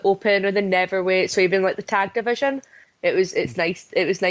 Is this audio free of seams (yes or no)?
no